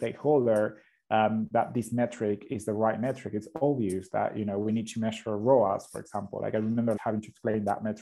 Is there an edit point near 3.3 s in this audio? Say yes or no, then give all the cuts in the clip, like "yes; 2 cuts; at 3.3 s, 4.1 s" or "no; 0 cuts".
no; 1 cut; at 7.0 s